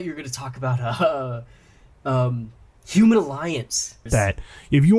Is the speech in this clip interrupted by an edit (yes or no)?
yes